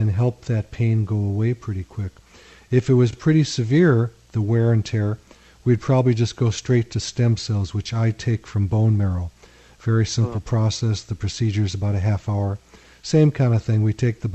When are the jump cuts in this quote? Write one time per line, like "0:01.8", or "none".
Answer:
none